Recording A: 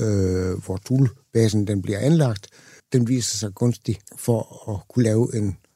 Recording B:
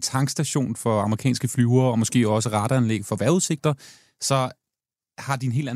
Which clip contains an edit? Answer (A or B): A